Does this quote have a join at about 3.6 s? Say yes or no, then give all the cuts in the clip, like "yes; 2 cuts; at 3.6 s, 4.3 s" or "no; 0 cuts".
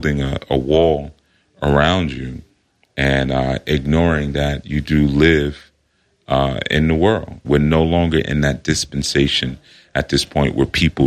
no; 1 cut; at 7.4 s